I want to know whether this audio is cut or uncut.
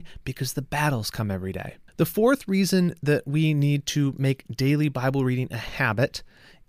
uncut